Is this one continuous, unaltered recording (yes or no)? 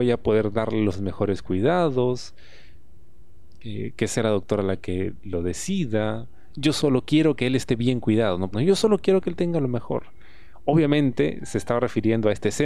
no